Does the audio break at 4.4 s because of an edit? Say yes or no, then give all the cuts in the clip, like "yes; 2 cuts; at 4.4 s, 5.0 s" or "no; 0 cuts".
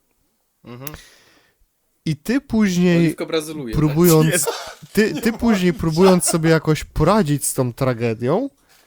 yes; 1 cut; at 4.4 s